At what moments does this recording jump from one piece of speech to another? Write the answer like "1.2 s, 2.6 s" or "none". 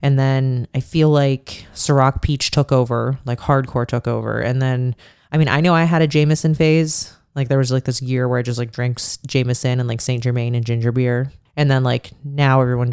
11.5 s